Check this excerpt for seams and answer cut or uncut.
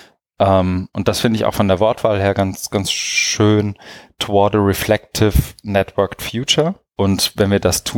cut